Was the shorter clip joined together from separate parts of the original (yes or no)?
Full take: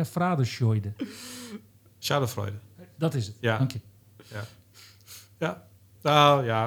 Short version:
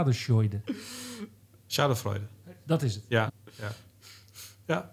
yes